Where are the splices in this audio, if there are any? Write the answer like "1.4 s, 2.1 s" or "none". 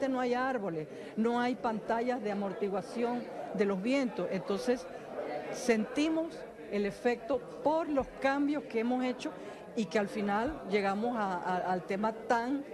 none